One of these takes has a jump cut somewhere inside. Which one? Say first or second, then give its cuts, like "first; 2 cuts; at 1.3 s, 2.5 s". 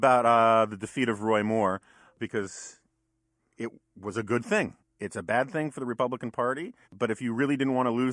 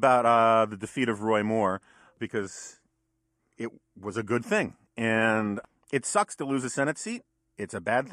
first; 2 cuts; at 4.8 s, 6.8 s